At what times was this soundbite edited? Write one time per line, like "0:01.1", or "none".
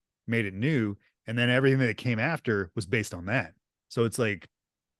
none